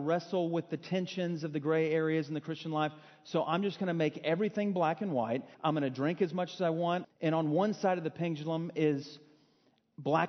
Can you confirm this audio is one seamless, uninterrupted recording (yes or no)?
no